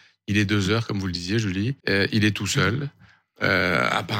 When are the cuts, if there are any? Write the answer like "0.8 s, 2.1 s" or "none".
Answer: 1.8 s